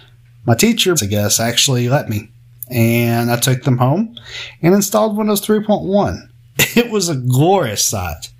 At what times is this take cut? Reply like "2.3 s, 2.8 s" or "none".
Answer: 0.9 s